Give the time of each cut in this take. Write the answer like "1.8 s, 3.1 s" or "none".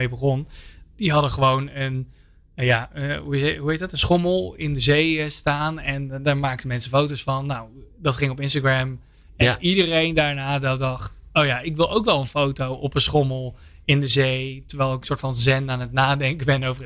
none